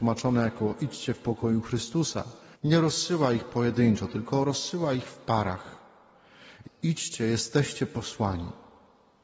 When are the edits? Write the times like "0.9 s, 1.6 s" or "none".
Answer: 2.5 s, 6.6 s